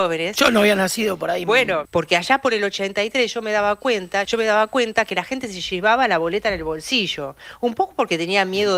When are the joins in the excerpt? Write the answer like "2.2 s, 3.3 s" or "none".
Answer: 1.8 s, 4.2 s